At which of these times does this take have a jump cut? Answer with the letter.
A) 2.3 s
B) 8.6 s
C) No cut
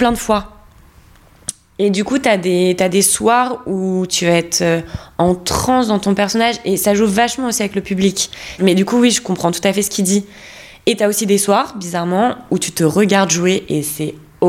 B